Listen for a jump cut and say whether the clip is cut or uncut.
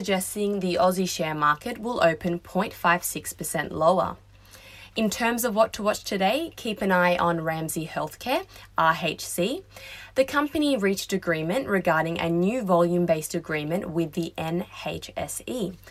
uncut